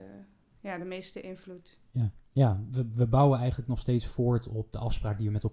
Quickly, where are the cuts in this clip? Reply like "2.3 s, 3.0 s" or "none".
none